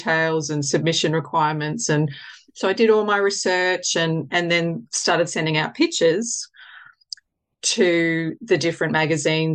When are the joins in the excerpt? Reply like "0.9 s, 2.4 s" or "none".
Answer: none